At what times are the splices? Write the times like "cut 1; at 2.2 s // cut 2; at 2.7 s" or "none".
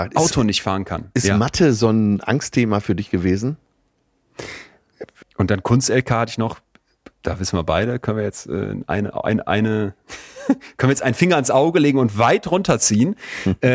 cut 1; at 5.2 s